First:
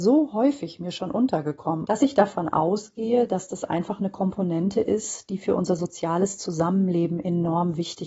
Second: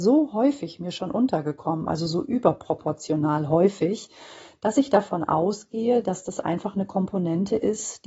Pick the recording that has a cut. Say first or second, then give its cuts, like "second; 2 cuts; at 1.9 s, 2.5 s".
first; 1 cut; at 1.8 s